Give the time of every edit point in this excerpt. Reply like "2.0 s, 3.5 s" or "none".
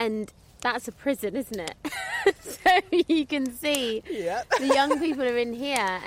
none